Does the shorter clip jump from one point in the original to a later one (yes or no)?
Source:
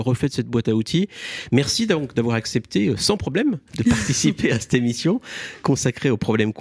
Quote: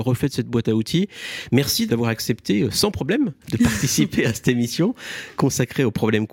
yes